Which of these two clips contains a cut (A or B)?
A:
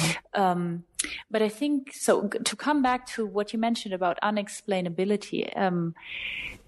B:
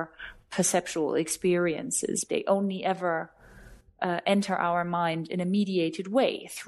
B